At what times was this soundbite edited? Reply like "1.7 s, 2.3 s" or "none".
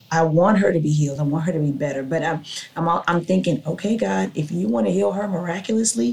none